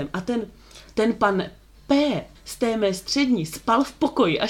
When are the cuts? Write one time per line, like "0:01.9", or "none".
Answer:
0:02.4